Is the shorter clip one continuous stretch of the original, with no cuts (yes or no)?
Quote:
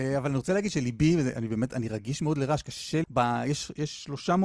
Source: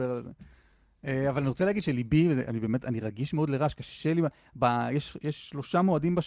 no